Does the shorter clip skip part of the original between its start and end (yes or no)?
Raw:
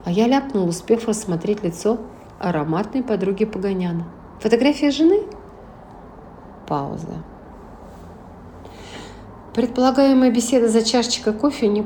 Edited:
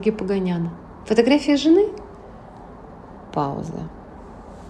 no